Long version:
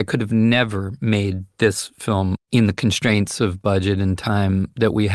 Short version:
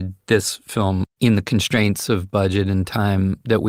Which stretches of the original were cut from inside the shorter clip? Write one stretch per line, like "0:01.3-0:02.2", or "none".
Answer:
none